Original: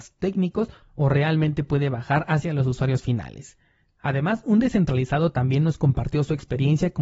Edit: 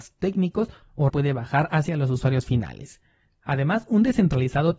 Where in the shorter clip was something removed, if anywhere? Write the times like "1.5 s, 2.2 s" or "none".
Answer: 1.1 s